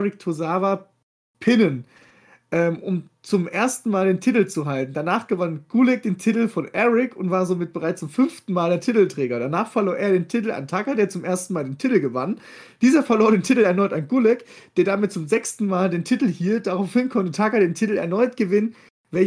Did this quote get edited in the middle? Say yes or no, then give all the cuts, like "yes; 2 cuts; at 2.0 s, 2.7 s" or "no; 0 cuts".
no; 0 cuts